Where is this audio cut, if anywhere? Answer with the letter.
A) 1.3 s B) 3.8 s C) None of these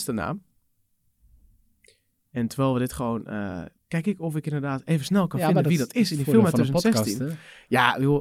B